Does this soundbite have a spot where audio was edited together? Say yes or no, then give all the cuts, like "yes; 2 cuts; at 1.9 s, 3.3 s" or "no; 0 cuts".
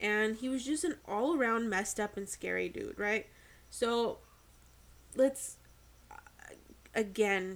no; 0 cuts